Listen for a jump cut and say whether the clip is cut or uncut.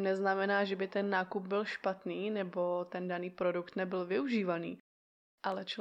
uncut